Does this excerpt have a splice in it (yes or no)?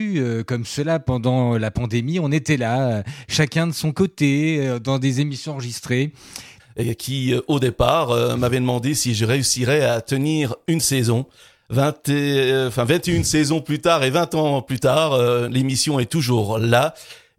yes